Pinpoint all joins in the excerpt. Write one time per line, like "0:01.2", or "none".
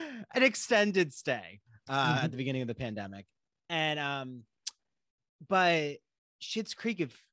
none